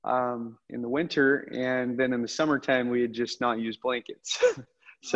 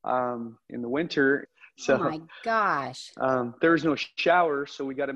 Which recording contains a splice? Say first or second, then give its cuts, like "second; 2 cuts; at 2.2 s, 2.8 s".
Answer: second; 1 cut; at 1.5 s